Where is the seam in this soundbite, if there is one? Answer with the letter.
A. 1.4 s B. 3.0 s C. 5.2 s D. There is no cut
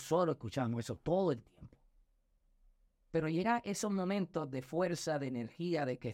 B